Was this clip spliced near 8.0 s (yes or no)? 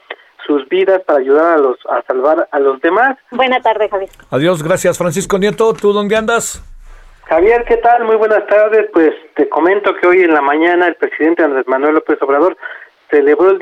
no